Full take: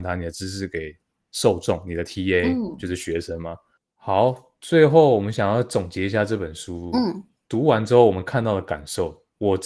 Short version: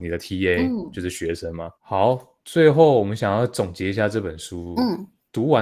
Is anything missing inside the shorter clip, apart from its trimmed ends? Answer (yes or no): yes